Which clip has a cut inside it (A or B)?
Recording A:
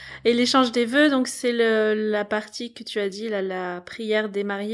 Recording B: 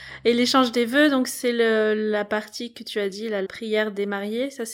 B